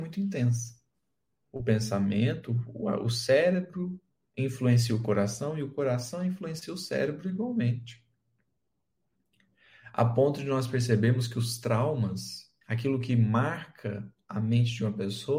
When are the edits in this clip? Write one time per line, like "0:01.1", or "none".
0:01.4
0:12.6

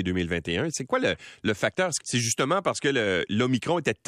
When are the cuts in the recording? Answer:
0:02.0

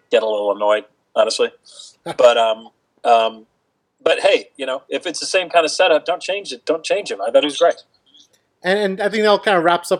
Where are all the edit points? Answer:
none

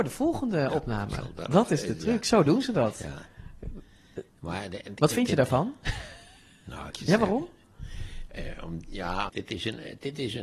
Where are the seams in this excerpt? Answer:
0:06.9
0:09.3

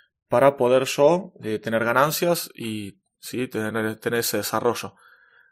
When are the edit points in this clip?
none

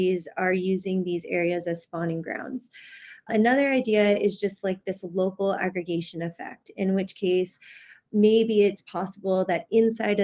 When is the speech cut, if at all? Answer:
none

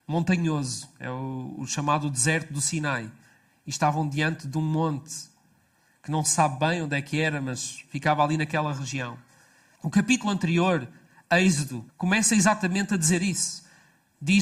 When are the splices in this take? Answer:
0:09.7
0:11.9

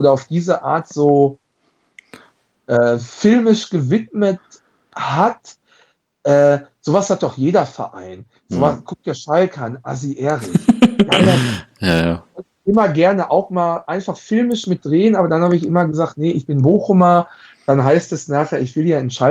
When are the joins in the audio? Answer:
none

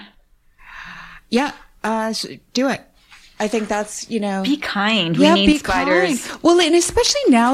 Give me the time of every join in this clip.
none

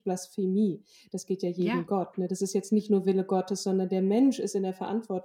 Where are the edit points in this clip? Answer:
none

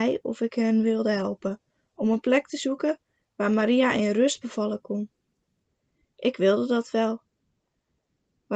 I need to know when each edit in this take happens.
none

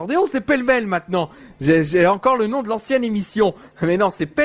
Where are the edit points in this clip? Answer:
none

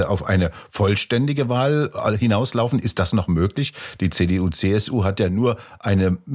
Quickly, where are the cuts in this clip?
none

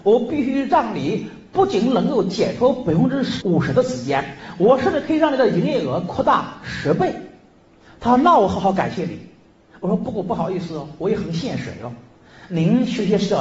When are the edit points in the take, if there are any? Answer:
0:03.4

